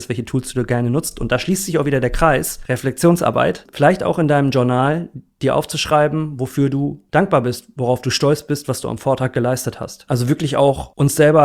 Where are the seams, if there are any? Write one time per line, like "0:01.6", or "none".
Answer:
none